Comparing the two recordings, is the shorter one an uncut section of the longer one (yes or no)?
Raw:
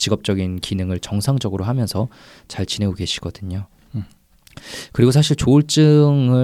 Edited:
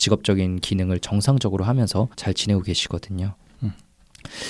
no